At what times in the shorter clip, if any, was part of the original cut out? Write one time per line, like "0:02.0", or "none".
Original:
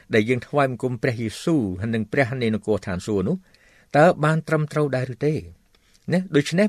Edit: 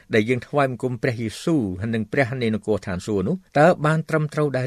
0:03.5